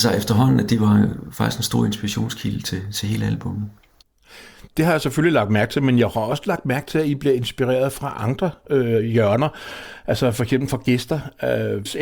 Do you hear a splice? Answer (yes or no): no